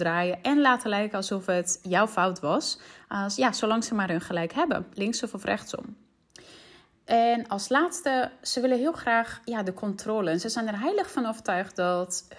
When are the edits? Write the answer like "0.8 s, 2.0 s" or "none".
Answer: none